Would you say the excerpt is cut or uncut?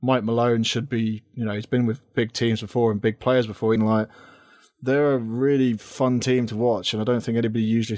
cut